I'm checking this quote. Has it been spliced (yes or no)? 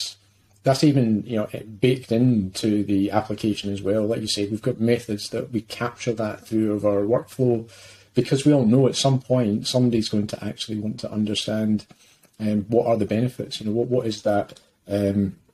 no